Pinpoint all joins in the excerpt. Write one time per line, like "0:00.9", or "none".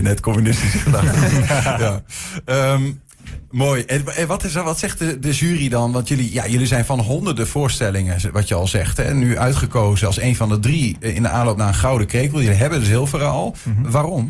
none